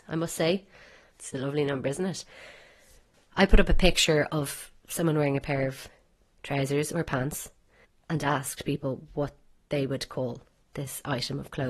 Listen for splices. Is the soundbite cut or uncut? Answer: cut